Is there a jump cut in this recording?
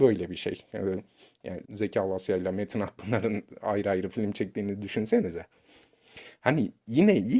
yes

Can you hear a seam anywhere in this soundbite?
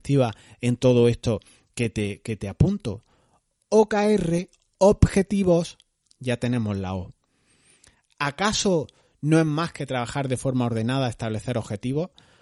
no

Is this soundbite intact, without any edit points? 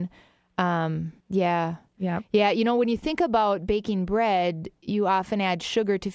no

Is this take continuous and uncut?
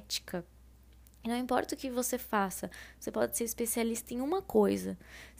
yes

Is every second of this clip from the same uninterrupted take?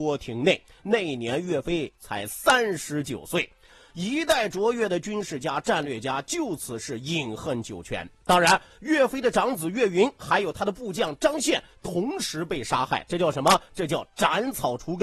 no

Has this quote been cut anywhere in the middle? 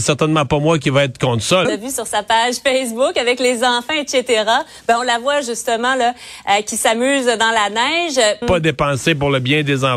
yes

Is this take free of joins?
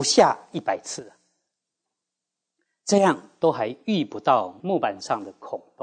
yes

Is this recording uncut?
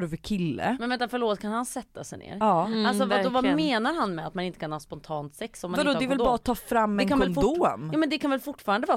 yes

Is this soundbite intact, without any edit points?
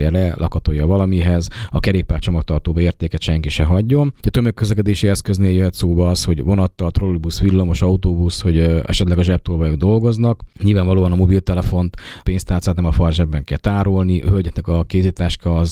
yes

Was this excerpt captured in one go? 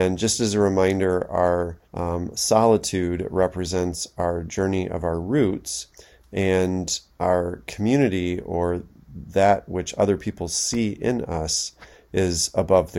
no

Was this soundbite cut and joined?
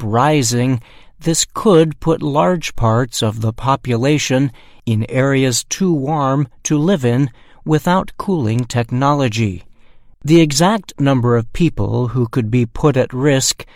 yes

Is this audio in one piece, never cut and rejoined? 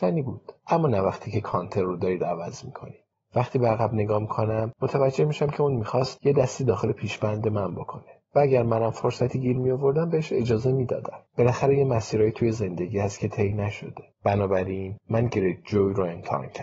no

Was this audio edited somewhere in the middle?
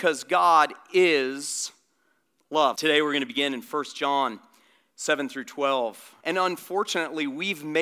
yes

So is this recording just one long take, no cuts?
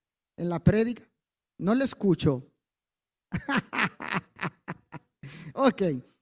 no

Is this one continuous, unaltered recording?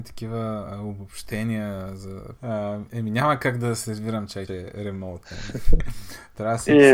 no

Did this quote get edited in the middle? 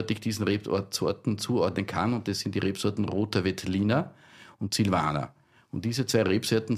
no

